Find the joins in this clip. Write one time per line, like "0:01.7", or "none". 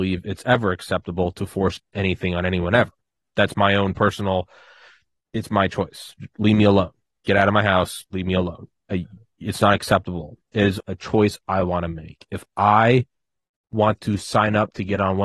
0:10.8